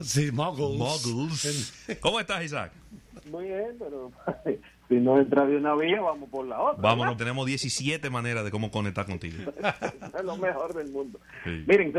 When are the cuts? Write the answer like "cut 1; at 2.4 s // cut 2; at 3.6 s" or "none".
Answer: cut 1; at 7.2 s